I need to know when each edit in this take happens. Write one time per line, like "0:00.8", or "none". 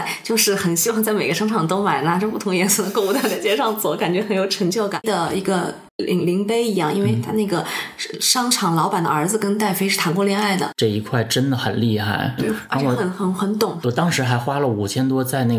0:05.0
0:10.7
0:12.4